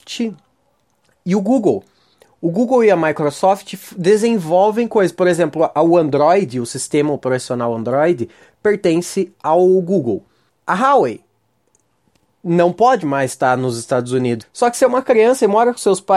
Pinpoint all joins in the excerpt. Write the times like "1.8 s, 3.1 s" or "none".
10.5 s, 14.4 s